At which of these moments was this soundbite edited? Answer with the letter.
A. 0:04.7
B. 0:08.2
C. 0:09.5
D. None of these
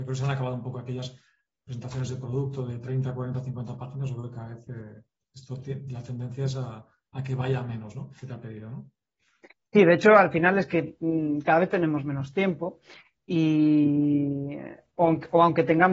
B